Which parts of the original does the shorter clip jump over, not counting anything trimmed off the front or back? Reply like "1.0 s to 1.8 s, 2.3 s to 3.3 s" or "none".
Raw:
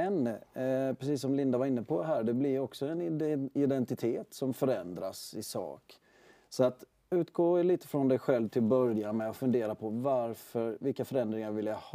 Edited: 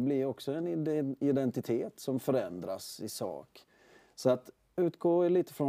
none